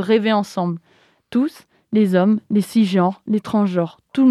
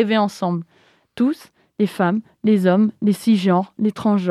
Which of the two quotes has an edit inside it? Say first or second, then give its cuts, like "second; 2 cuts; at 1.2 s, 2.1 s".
first; 1 cut; at 1.8 s